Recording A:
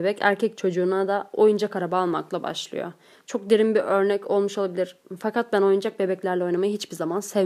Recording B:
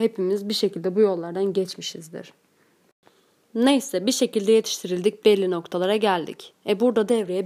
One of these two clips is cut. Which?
B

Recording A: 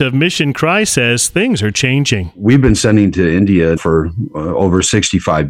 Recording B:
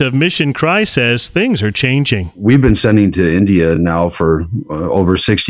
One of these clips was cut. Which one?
A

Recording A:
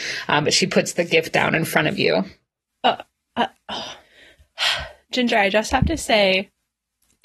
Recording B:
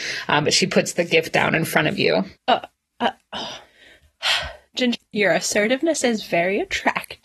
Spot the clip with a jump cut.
B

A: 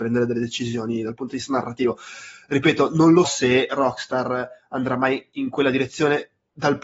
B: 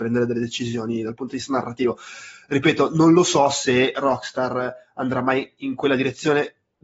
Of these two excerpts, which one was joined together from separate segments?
A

